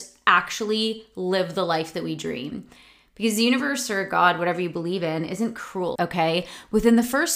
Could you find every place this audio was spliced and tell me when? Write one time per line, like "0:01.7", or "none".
0:06.0